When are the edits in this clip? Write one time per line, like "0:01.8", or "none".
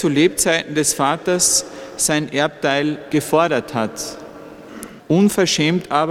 0:05.0